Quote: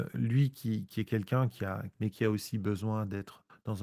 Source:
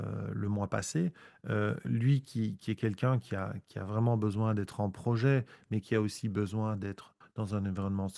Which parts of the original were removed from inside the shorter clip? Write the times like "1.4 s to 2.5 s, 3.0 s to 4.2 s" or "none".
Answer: 3.6 s to 5.6 s